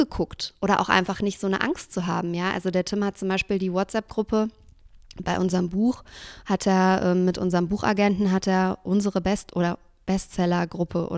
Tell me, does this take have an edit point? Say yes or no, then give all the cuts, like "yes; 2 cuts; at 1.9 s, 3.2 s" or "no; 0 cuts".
no; 0 cuts